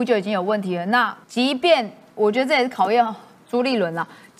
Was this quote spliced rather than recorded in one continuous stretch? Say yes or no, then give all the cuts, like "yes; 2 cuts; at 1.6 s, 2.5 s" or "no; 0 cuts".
yes; 1 cut; at 1.2 s